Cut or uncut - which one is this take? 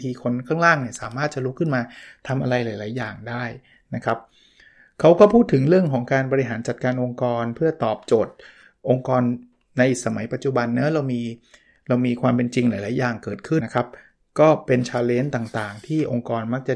cut